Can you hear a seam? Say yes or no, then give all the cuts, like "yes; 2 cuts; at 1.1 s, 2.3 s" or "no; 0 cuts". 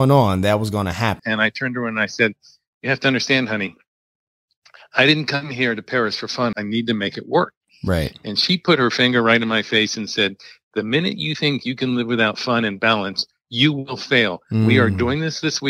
yes; 2 cuts; at 1.2 s, 6.5 s